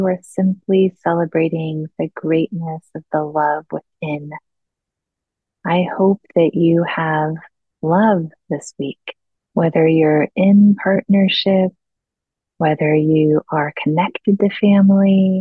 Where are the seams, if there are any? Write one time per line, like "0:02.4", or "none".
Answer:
0:09.4